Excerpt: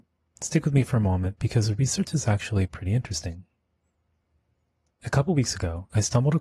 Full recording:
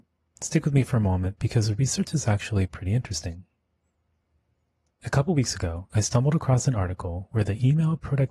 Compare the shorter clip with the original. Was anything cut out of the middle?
no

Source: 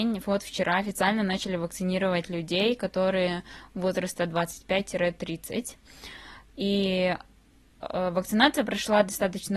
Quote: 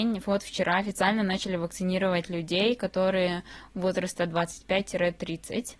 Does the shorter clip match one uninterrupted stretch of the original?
yes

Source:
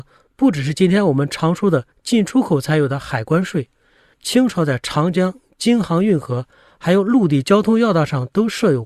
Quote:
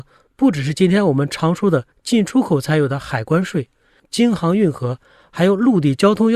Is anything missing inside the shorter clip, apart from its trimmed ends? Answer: yes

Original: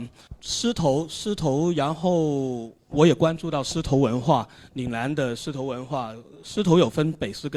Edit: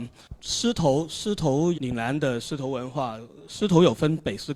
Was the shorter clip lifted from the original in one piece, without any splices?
no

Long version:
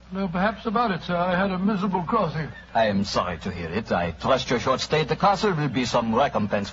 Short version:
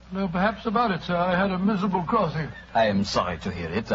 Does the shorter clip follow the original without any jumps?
yes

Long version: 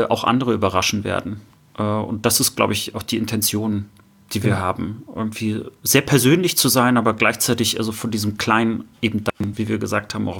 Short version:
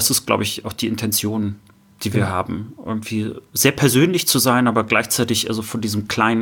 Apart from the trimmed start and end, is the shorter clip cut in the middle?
no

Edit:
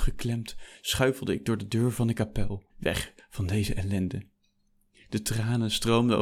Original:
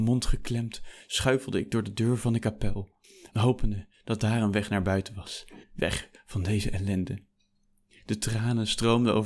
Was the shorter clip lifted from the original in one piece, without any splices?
no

